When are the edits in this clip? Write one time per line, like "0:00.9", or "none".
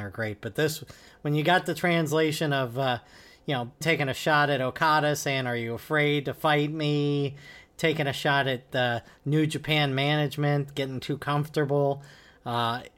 0:03.8